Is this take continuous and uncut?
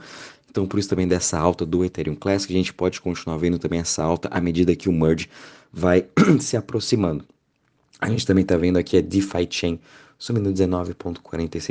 yes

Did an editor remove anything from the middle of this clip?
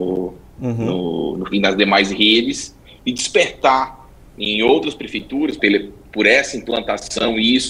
yes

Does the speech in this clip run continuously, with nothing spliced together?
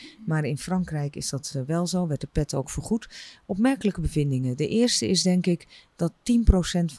yes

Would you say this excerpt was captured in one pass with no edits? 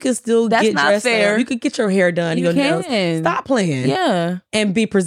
yes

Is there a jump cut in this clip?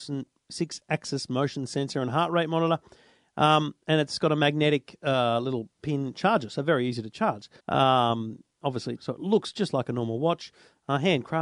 yes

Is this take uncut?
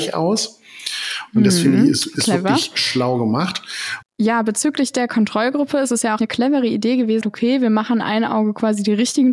no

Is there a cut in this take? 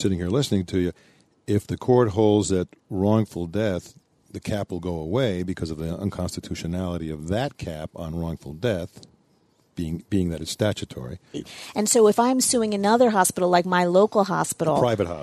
yes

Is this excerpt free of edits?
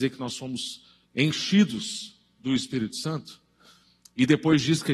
no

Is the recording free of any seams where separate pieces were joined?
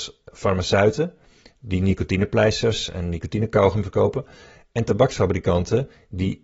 yes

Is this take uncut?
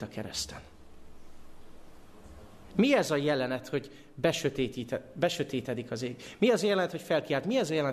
yes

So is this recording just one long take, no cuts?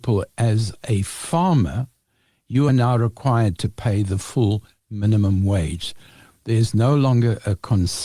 yes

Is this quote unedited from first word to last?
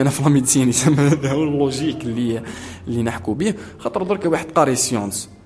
yes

